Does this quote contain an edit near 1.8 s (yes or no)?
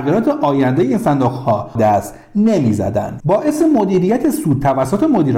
yes